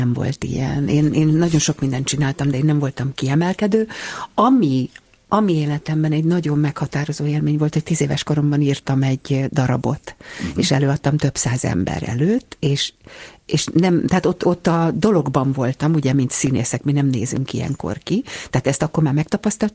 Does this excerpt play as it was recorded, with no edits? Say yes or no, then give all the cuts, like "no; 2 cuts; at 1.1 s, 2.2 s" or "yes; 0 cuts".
yes; 0 cuts